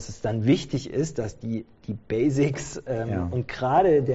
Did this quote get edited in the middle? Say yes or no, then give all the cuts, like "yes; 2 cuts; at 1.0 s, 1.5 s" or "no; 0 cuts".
no; 0 cuts